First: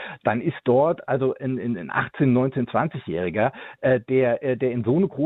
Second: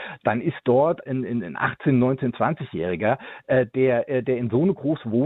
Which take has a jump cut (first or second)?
second